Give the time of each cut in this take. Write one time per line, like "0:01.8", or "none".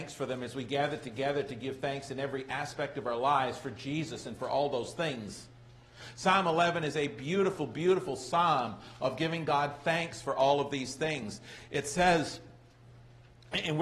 none